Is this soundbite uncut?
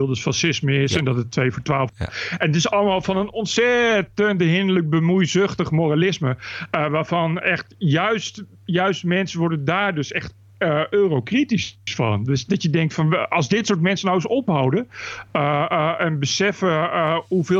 no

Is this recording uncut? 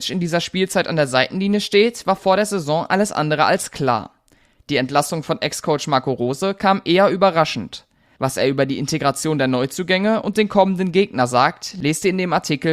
no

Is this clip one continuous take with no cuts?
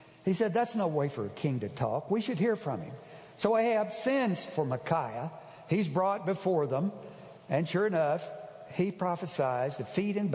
yes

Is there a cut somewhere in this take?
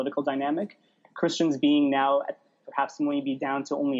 no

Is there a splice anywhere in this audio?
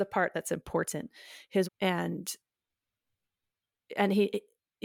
yes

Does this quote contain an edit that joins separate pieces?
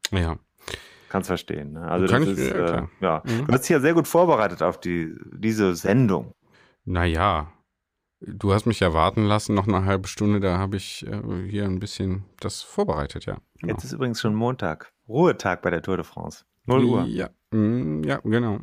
no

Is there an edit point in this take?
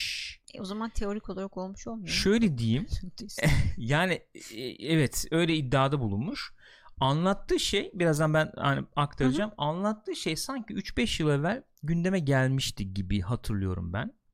no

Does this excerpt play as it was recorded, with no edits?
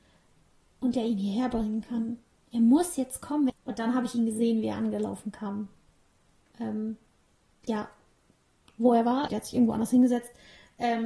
no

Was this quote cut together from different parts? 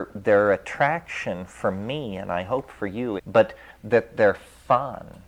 yes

